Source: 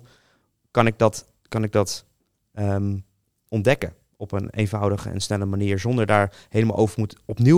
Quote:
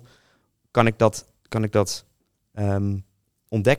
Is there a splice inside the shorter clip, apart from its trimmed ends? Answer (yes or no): no